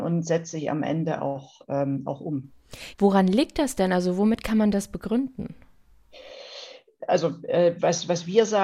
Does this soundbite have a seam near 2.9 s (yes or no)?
yes